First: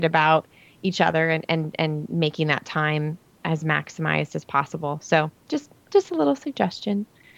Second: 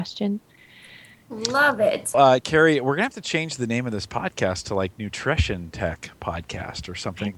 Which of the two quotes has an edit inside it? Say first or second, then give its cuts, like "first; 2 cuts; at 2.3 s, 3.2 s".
second; 1 cut; at 2.1 s